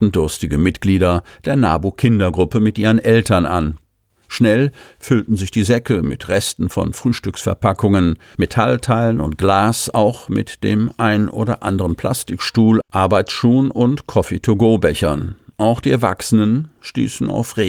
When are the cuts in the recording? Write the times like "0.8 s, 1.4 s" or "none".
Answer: 8.3 s